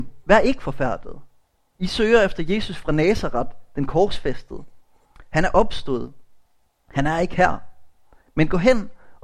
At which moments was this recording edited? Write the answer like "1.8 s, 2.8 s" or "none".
8.2 s